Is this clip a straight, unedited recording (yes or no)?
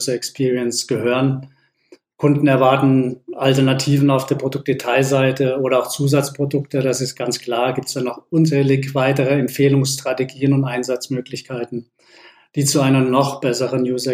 yes